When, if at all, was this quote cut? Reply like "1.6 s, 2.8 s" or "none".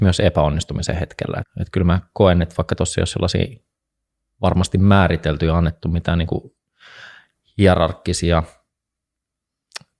1.4 s